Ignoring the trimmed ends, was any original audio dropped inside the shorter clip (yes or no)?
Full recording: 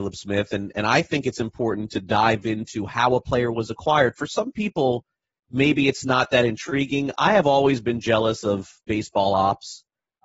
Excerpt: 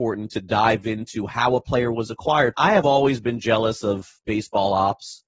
yes